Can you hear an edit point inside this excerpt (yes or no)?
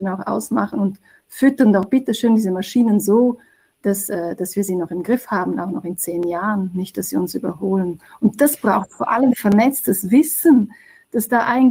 no